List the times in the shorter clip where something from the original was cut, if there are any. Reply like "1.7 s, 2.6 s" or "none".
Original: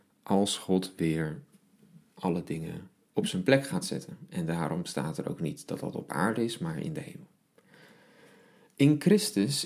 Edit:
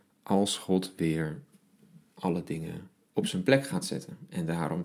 none